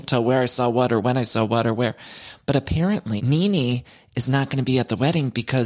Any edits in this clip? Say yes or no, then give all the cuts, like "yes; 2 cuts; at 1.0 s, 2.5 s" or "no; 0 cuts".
yes; 1 cut; at 3.2 s